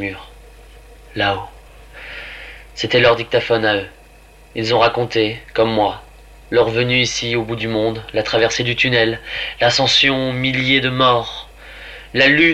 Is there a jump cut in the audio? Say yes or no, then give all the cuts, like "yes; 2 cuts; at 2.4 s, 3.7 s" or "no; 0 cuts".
no; 0 cuts